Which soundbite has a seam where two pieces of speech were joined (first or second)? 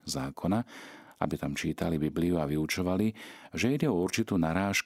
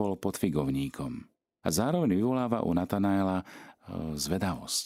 second